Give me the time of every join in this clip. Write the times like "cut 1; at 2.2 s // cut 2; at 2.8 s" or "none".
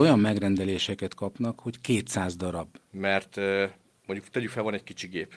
cut 1; at 2.9 s